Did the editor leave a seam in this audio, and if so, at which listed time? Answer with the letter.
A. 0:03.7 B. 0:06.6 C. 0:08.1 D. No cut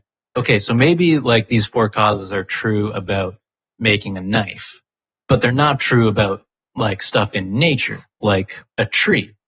D